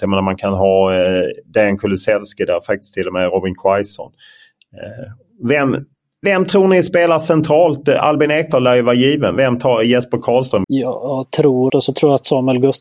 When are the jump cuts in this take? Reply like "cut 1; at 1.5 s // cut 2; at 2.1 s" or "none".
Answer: cut 1; at 10.6 s // cut 2; at 11.7 s